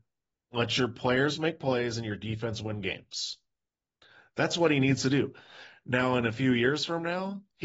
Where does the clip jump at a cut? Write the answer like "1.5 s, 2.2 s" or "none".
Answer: none